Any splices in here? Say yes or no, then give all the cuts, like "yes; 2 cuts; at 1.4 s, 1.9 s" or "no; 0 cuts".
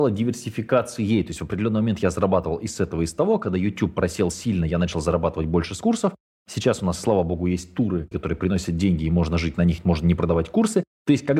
yes; 1 cut; at 8.1 s